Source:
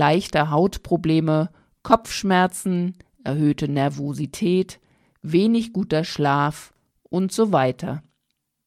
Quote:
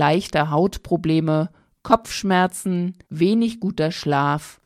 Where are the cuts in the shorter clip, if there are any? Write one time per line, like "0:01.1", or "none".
0:03.1